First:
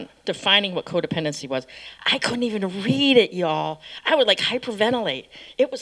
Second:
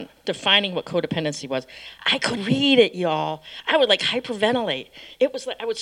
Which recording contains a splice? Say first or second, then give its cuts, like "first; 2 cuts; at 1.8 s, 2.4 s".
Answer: second; 1 cut; at 2.4 s